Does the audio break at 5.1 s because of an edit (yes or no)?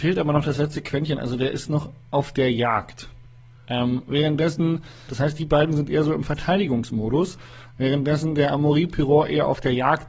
yes